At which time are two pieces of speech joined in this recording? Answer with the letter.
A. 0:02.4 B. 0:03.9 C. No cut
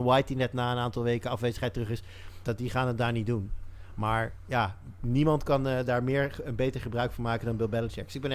A